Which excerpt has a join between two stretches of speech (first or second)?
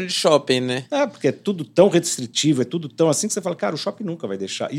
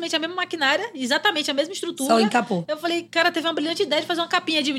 second